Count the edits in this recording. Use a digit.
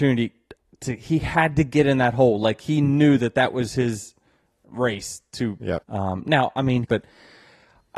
2